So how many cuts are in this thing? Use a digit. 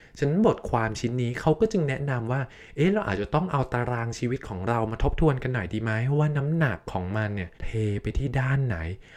1